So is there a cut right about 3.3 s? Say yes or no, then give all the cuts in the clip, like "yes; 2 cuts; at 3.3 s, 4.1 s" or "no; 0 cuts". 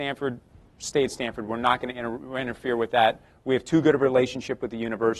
no; 0 cuts